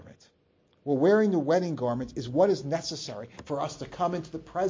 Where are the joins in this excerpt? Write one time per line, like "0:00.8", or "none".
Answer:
none